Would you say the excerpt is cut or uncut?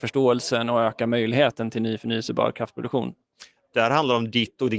cut